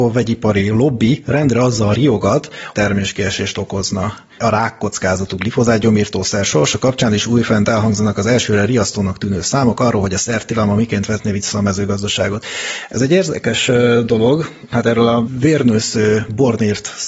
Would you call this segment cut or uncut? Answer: cut